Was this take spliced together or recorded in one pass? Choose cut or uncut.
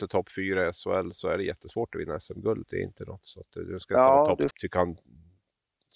cut